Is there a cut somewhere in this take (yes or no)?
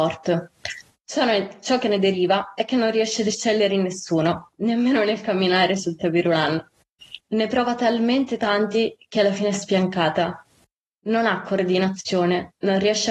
no